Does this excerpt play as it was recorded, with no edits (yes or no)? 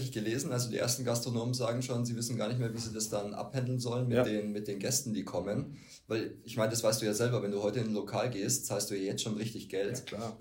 yes